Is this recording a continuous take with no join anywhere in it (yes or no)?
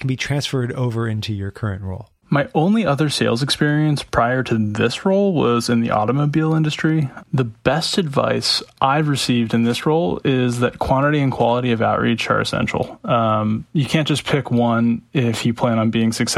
no